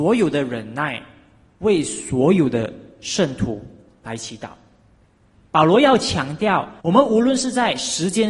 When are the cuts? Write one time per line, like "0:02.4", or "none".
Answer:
0:05.5
0:06.8